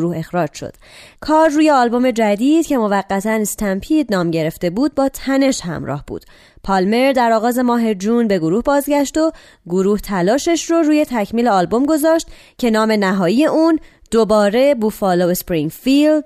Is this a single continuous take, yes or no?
yes